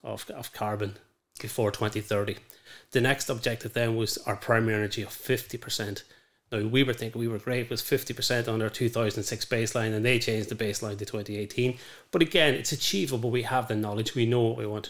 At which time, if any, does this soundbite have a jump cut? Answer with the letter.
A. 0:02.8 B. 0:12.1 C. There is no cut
C